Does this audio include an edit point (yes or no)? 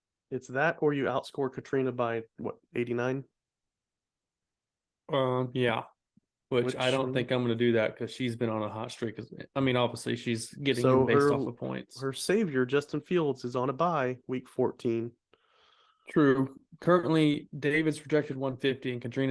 no